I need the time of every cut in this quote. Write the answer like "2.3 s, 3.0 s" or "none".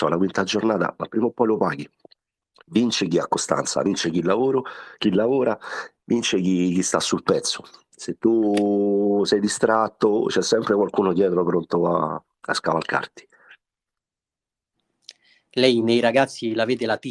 none